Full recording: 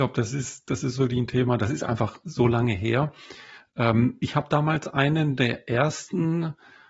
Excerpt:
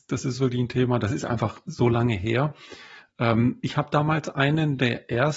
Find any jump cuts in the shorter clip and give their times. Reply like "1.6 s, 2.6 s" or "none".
none